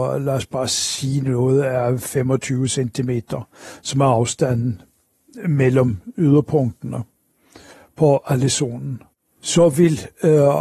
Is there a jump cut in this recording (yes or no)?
no